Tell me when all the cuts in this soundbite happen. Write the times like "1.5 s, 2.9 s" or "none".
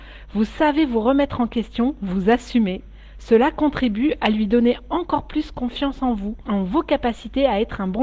none